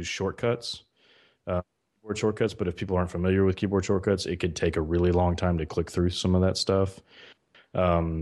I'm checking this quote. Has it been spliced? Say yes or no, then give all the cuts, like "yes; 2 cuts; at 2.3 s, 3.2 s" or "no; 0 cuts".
no; 0 cuts